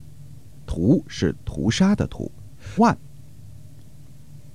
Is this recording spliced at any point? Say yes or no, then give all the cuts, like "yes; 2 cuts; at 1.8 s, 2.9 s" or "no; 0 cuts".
yes; 1 cut; at 2.8 s